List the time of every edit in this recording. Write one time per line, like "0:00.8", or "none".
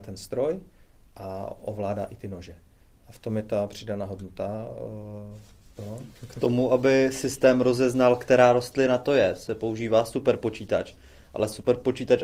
0:05.8